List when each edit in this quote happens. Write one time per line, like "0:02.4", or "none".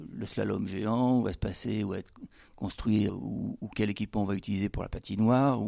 0:03.1